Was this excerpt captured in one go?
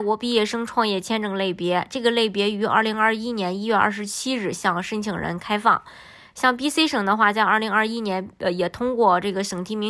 yes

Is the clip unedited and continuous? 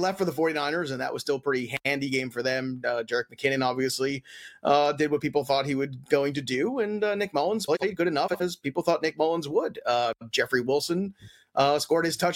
yes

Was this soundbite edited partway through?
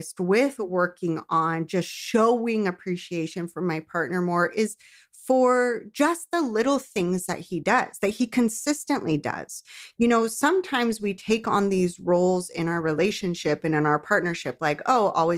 no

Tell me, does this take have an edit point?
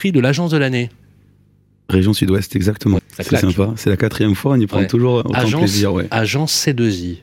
yes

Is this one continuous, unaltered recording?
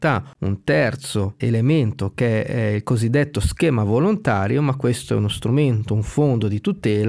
no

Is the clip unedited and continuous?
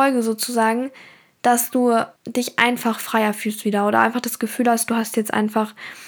no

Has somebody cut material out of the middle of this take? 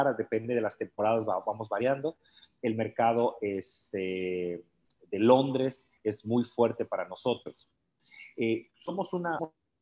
no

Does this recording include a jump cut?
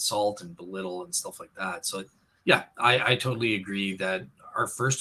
no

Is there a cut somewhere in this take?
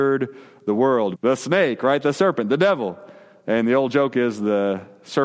yes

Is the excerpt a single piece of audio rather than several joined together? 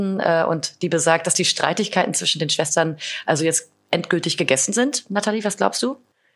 yes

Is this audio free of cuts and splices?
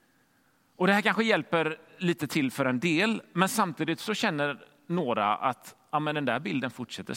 yes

